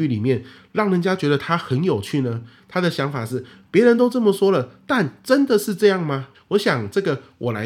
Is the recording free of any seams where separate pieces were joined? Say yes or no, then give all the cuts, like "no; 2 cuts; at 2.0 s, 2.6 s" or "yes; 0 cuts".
no; 1 cut; at 6.3 s